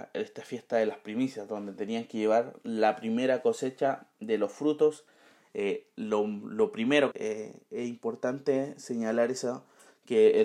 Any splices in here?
yes; 1 cut; at 7.1 s

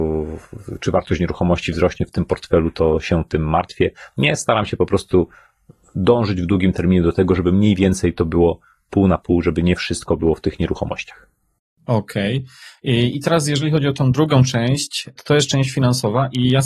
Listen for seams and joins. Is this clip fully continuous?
yes; 0 cuts

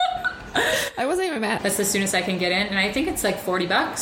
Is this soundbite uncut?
no; 1 cut; at 1.6 s

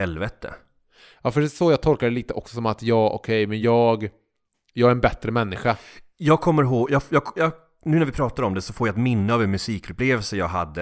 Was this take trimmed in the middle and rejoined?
no; 0 cuts

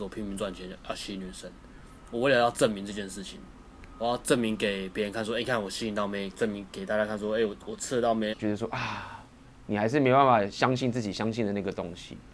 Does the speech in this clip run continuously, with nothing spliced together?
no; 1 cut; at 8.3 s

